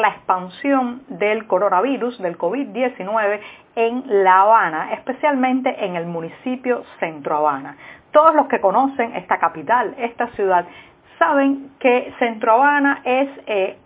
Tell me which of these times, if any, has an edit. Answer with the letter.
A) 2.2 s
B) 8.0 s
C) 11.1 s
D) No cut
D